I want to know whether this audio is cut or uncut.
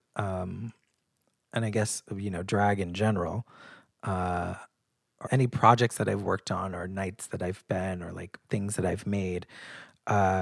cut